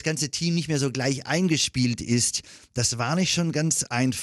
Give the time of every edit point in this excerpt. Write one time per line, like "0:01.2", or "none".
none